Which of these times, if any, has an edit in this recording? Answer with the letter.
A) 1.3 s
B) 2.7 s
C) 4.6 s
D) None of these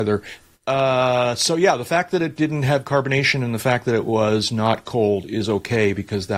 D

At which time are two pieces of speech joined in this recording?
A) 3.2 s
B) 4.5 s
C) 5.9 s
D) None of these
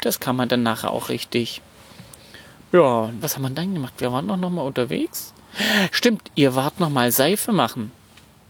A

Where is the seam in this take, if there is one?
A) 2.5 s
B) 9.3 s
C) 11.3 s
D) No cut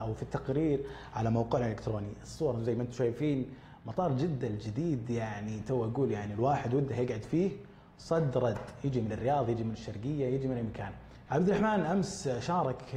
C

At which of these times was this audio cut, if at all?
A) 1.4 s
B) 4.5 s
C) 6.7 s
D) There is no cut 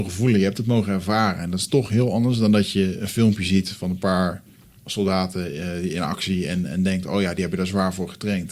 D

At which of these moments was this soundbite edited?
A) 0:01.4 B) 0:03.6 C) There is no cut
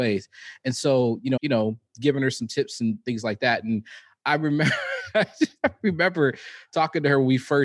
A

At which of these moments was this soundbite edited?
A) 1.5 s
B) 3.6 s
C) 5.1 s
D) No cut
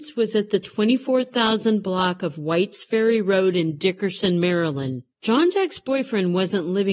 C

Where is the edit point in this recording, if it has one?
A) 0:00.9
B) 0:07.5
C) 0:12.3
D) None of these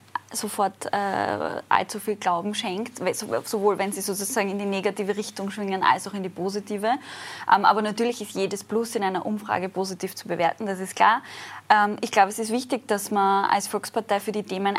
D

